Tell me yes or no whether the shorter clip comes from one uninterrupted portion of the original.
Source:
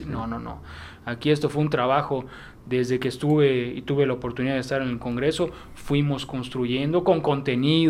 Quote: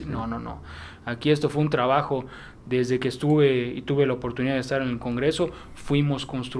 yes